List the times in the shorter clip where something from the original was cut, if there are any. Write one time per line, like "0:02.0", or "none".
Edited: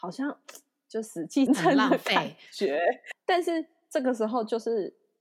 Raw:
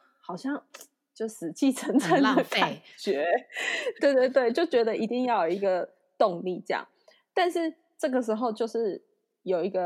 0:01.5
0:03.1